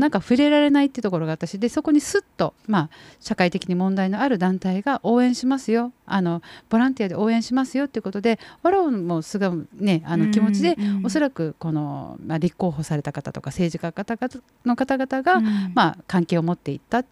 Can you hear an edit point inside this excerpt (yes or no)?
yes